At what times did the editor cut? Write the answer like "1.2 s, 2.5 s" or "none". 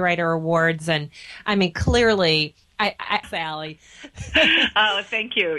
3.2 s